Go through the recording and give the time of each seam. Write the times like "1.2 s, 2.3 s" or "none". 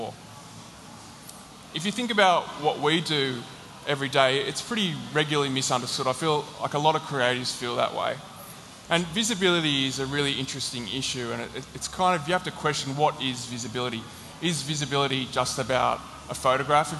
8.9 s